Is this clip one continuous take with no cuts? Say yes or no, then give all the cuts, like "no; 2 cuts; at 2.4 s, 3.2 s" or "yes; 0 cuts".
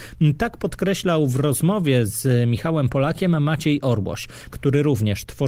no; 1 cut; at 4.5 s